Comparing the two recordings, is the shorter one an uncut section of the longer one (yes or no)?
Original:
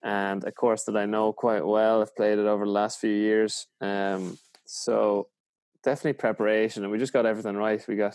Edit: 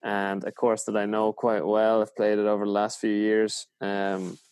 yes